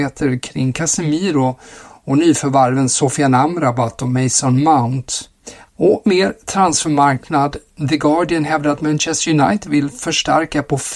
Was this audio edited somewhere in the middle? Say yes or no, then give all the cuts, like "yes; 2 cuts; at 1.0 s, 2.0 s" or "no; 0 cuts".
yes; 1 cut; at 5.7 s